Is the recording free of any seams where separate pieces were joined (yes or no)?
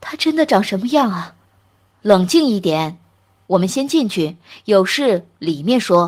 yes